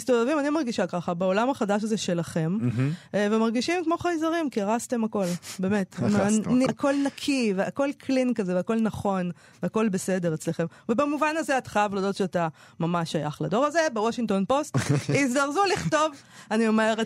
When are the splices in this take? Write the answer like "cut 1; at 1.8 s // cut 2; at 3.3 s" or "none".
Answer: cut 1; at 6.7 s